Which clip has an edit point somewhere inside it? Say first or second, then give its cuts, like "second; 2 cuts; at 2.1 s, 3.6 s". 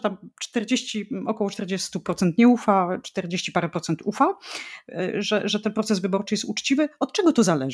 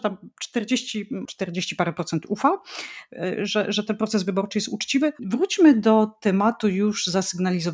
second; 2 cuts; at 1.2 s, 5.2 s